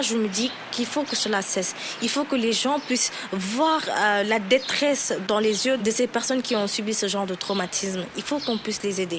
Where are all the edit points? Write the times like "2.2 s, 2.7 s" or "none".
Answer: none